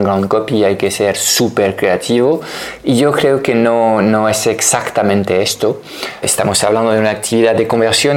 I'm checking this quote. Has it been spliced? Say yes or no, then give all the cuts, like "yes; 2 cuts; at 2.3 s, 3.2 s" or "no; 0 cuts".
yes; 1 cut; at 6.2 s